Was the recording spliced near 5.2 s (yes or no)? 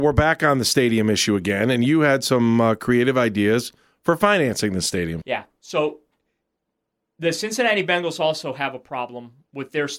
yes